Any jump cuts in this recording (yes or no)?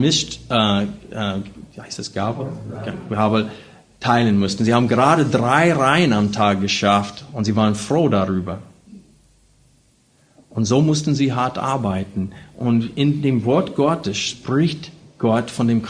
no